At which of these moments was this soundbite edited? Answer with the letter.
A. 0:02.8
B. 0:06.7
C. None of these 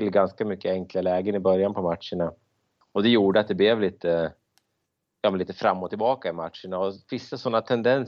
A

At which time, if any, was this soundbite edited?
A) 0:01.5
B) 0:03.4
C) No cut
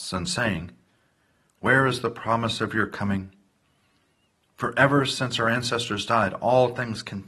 C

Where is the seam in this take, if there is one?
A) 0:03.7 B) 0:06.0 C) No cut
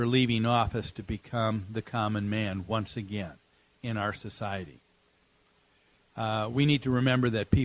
C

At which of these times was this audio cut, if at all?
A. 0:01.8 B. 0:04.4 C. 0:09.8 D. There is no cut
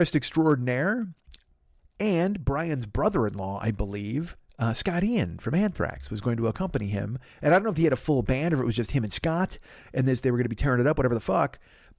A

